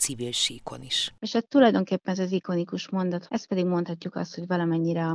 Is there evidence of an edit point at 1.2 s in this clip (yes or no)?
yes